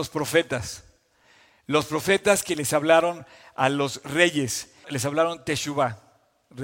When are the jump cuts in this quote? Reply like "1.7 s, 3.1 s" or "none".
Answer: 4.8 s